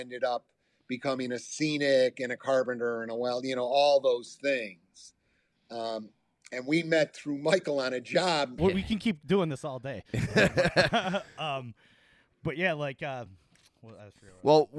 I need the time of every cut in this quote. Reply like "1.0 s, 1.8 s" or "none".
8.6 s